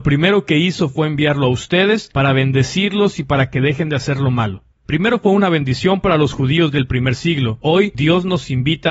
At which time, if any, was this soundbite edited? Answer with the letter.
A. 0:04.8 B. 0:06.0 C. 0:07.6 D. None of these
D